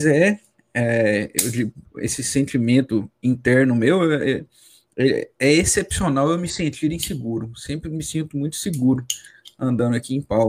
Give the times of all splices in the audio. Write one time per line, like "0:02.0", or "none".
none